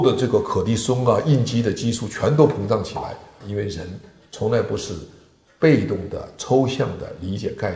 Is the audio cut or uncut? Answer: cut